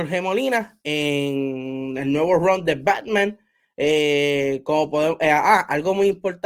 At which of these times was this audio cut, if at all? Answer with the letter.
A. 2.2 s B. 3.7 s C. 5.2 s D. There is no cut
D